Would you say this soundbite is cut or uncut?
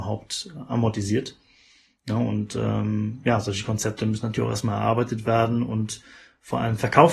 uncut